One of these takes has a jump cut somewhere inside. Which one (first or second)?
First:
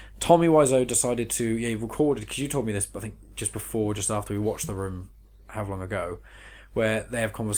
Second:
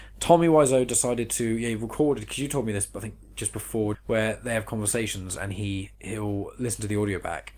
second